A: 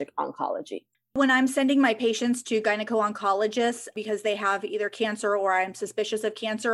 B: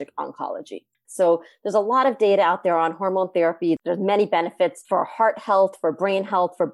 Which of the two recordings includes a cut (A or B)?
B